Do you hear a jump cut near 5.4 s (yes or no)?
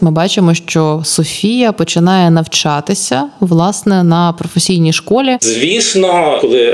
yes